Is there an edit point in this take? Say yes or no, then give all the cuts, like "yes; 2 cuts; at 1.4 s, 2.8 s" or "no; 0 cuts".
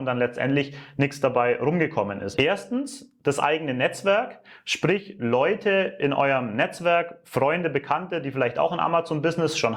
yes; 1 cut; at 2.3 s